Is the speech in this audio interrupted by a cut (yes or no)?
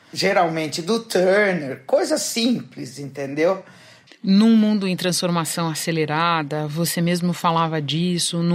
yes